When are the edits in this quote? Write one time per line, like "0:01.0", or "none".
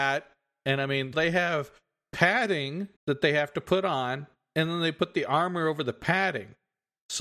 0:01.1
0:03.0